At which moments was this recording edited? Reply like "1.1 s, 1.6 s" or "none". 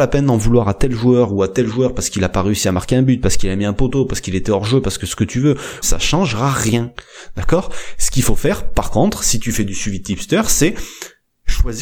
5.8 s